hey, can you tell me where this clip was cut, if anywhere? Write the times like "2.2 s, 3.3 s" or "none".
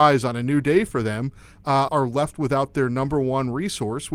1.9 s